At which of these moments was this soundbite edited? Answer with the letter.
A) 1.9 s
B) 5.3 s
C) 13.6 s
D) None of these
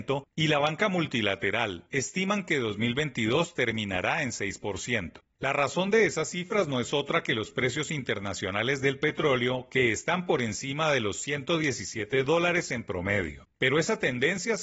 A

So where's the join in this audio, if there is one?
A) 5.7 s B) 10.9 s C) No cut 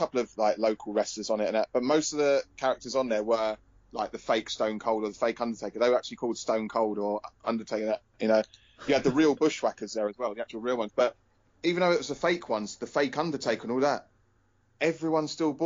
C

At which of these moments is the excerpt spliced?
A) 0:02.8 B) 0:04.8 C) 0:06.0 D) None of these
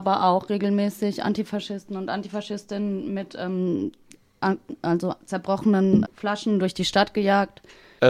C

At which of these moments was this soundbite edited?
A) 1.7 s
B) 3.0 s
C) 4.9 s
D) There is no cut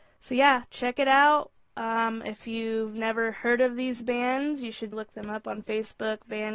C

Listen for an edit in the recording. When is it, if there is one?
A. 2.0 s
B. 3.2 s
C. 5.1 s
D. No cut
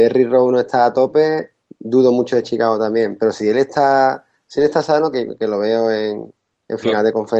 C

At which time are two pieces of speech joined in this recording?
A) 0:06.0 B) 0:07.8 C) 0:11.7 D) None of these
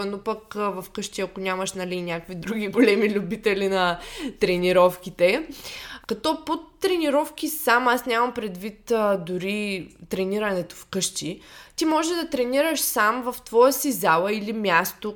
A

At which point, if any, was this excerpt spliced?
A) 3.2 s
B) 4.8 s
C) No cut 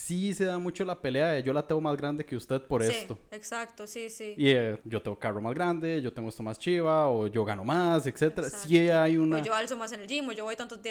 B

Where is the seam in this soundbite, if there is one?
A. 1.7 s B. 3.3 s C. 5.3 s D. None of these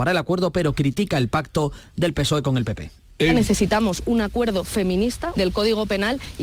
C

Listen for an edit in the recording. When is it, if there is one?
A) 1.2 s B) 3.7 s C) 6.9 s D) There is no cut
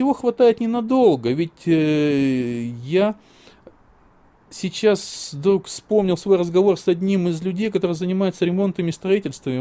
D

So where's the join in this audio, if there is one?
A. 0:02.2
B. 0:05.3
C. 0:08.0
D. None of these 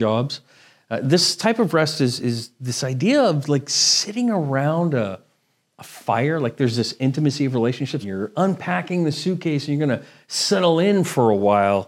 C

